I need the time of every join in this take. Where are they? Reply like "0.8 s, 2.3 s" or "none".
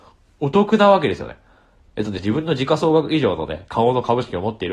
2.2 s, 3.7 s